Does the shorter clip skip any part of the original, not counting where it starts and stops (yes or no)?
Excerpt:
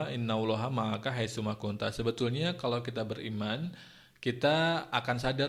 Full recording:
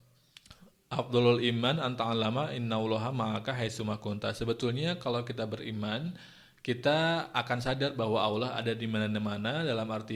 no